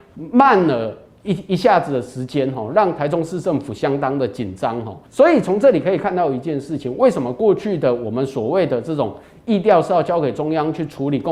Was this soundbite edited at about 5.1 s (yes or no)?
yes